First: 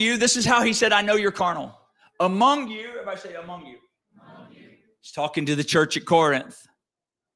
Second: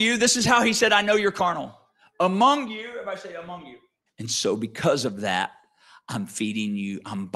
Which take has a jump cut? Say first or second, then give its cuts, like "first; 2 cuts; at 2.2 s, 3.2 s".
second; 1 cut; at 4.1 s